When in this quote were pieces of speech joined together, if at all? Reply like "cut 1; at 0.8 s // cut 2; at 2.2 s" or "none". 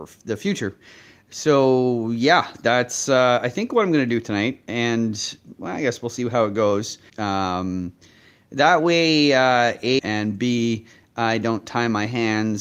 cut 1; at 7.1 s // cut 2; at 10.0 s